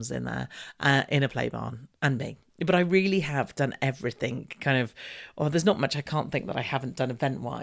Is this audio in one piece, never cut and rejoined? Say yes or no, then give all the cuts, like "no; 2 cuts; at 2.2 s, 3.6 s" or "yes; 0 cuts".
no; 1 cut; at 2.5 s